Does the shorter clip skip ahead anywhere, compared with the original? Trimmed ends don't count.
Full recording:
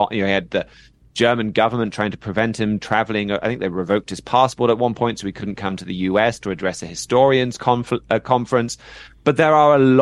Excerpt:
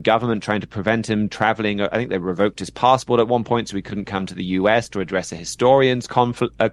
no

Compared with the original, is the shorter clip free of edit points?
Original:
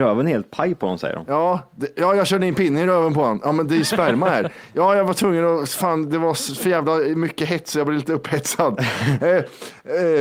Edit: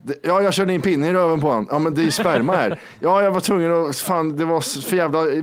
yes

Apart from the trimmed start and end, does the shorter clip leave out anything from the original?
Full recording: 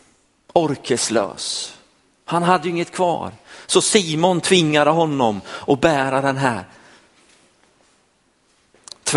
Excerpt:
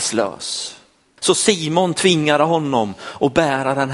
yes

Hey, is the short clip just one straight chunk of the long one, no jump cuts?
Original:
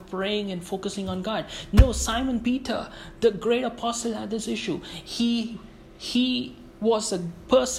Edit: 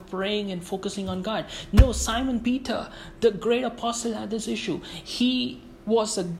no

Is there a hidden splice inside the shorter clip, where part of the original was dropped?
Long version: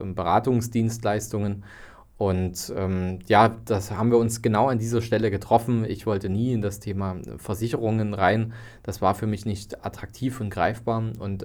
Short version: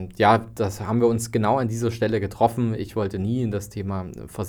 no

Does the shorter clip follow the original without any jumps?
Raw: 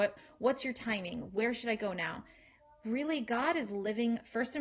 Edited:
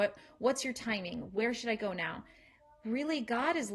yes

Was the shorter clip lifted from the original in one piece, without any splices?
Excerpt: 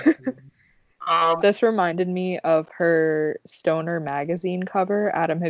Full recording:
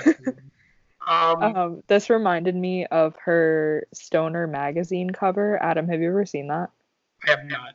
no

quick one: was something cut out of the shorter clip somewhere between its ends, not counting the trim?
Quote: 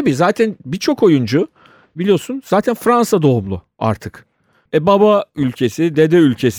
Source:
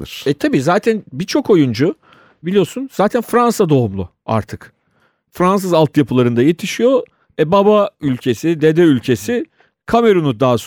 yes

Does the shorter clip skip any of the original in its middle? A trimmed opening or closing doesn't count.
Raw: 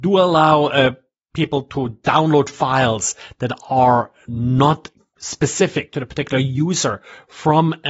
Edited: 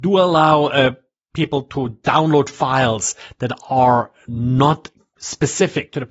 no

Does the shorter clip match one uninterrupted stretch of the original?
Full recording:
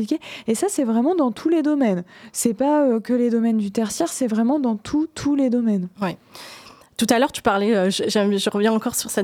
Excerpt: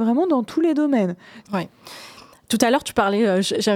no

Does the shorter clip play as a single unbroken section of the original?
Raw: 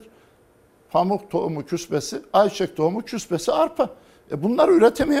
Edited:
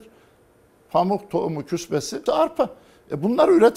no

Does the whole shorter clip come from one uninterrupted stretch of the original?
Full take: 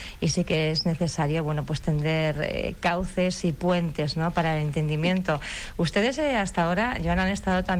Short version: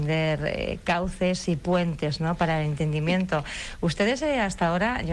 yes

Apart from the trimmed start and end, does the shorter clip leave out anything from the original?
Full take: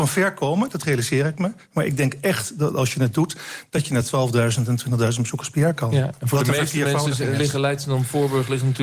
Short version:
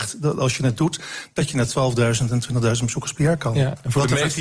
no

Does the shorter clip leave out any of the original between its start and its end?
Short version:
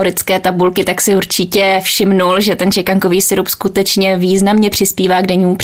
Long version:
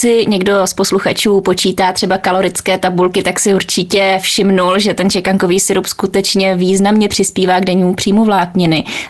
no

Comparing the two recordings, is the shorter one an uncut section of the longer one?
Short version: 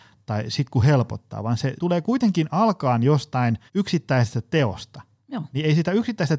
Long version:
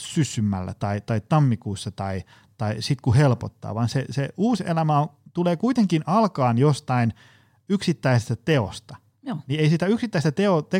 no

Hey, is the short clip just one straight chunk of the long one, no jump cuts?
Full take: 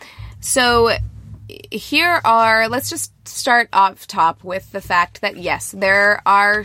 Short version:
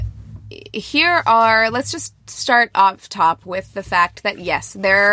yes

